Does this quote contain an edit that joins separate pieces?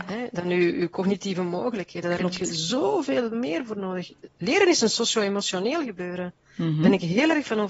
no; 0 cuts

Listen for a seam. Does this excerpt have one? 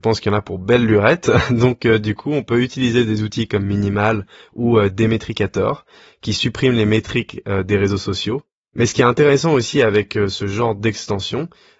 no; 0 cuts

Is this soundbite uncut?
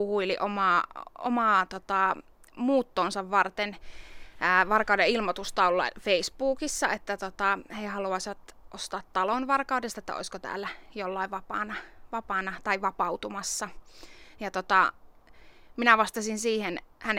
yes; 0 cuts

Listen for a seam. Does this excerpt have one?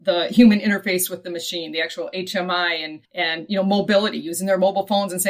yes; 1 cut; at 3.1 s

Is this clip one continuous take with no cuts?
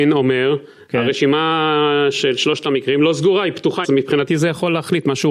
no; 1 cut; at 3.8 s

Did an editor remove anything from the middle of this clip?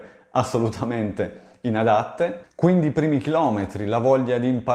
no; 0 cuts

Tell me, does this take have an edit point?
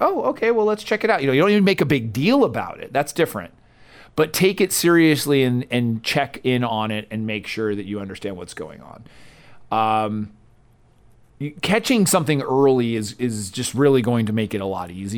no; 0 cuts

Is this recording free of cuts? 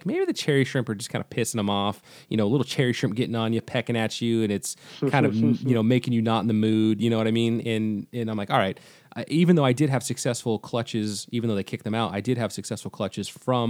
yes; 0 cuts

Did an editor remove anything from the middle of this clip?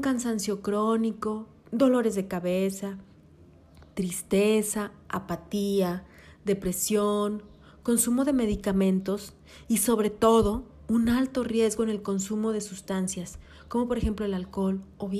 no; 0 cuts

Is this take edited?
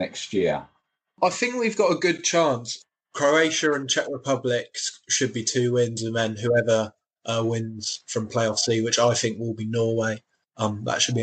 no; 0 cuts

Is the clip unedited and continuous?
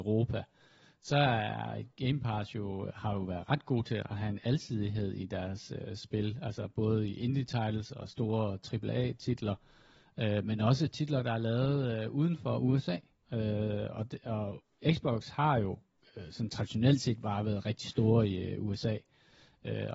yes; 0 cuts

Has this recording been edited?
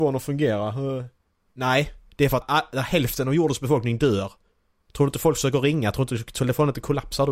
yes; 1 cut; at 2.4 s

